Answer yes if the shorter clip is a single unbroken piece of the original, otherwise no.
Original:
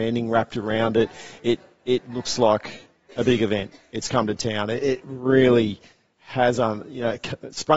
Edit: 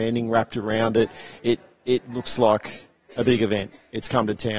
yes